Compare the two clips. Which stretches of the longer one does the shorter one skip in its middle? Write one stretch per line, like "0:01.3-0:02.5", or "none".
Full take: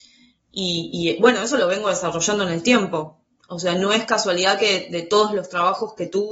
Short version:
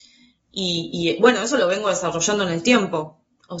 none